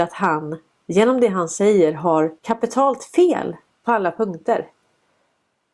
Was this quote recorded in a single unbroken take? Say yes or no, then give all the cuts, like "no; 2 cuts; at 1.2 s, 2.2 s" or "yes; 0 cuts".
no; 1 cut; at 2.4 s